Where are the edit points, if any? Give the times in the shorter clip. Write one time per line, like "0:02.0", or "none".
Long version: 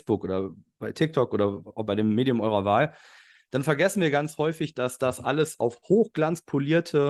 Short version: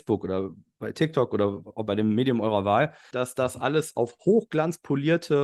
0:03.1